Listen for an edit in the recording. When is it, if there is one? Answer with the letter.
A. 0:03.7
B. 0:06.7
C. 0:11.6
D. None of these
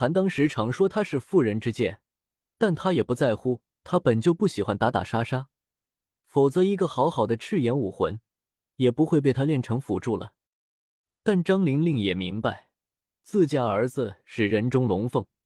D